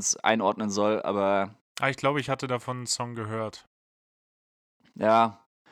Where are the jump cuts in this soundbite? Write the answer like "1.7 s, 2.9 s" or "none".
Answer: none

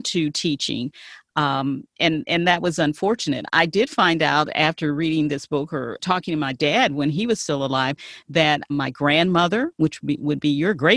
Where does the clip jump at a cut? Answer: 6.0 s, 8.7 s

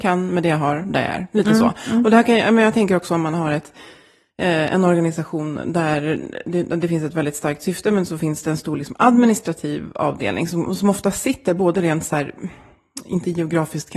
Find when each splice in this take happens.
none

